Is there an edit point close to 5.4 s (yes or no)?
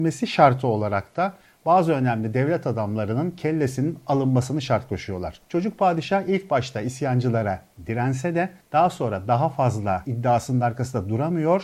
yes